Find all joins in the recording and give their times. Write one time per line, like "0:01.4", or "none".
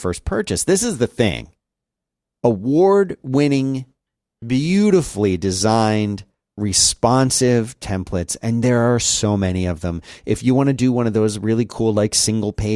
none

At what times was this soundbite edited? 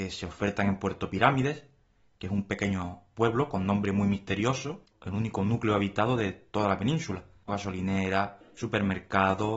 0:07.5

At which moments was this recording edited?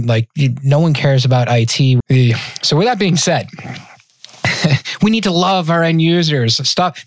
0:02.0

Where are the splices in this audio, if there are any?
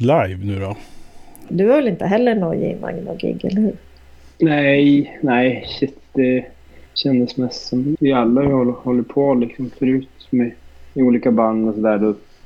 0:01.5
0:06.9
0:07.9

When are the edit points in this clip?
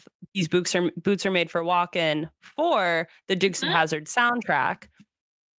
none

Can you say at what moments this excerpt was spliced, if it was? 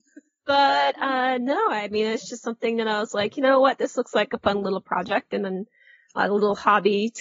none

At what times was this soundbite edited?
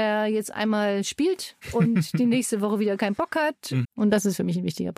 0:01.6
0:03.8

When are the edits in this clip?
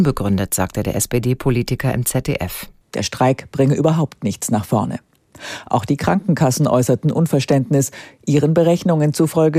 0:02.8

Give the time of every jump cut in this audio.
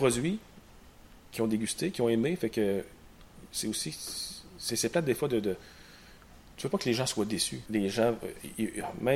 0:07.7

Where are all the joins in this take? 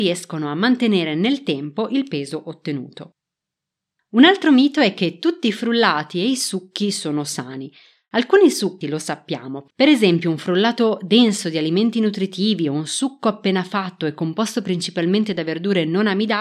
0:08.8

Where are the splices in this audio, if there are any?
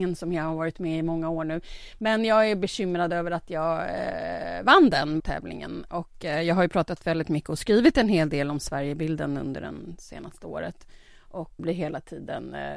0:05.2
0:11.6

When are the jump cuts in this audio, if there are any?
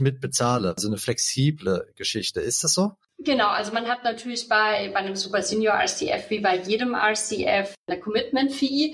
0:03.1

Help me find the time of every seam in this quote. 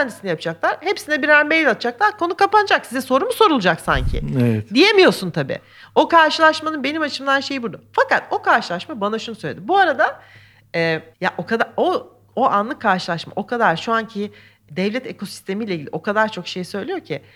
0:11.1
0:14.7

